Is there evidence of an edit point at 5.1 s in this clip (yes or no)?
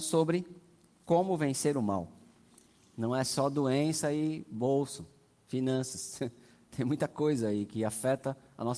no